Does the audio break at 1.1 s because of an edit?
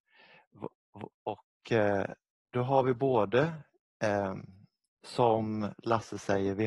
yes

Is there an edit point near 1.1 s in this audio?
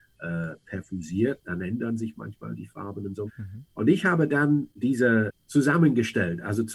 no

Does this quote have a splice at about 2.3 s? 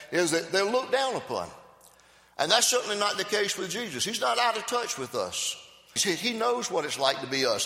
no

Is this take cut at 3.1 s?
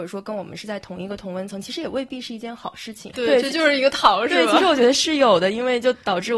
yes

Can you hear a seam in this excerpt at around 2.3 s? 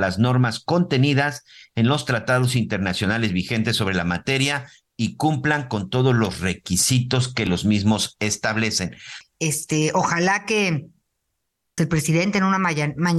no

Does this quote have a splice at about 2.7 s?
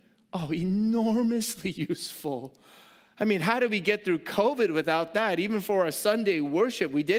no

